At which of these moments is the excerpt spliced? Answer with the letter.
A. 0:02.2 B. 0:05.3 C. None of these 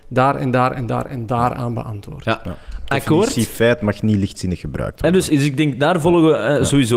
B